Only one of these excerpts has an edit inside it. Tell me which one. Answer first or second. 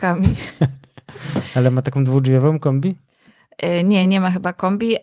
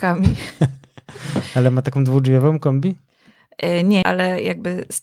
second